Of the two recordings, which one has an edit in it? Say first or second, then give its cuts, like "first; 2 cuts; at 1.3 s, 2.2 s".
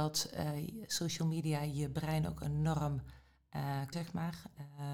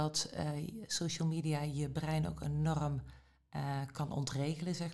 first; 1 cut; at 3.9 s